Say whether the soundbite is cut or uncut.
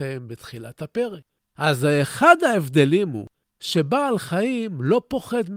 uncut